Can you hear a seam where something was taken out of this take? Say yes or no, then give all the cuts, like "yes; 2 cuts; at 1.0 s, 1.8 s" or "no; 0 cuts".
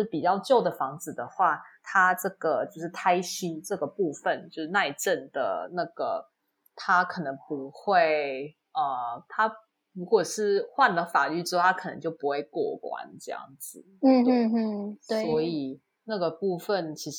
no; 0 cuts